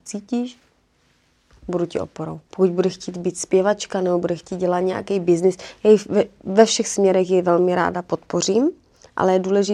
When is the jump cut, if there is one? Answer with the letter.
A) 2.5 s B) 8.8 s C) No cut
A